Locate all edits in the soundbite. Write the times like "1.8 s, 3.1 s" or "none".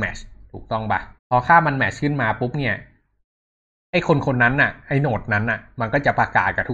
1.2 s